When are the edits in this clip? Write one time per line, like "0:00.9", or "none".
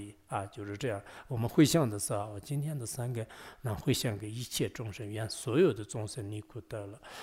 none